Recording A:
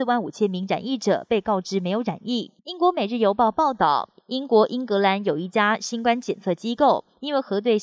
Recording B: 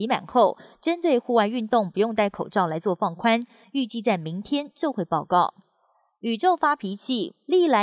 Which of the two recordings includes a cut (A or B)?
A